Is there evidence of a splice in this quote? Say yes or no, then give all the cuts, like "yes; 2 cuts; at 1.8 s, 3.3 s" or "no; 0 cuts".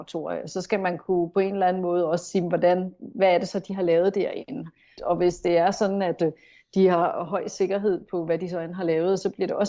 yes; 1 cut; at 5.0 s